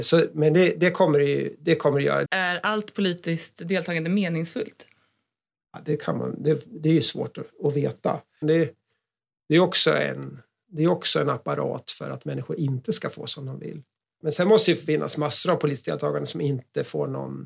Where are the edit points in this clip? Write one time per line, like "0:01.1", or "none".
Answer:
0:02.3
0:08.4
0:14.2

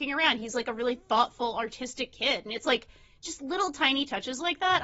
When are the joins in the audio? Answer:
none

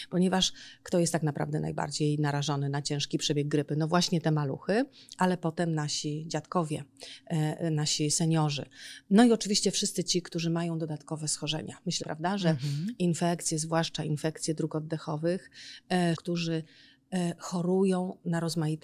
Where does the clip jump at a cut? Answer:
0:12.0
0:16.1

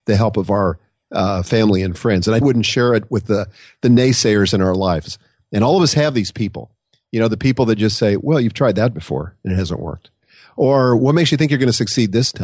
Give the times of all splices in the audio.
0:02.4

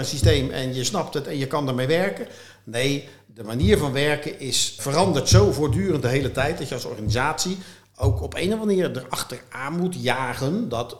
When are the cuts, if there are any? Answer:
0:04.8

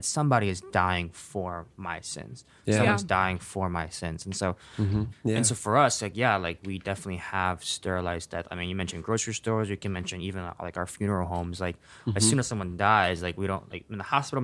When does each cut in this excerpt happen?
0:05.1

